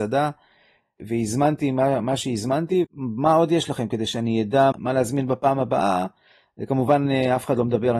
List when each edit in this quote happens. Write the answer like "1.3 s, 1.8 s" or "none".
2.8 s, 4.7 s